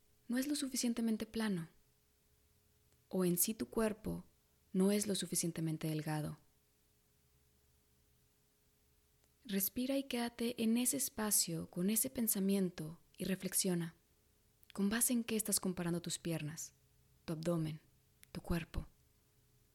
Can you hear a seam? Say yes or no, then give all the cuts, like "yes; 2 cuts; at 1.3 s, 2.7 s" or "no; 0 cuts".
no; 0 cuts